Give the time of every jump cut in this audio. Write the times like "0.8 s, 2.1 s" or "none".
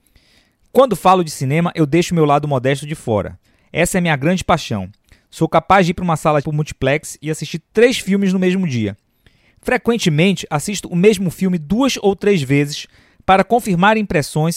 6.4 s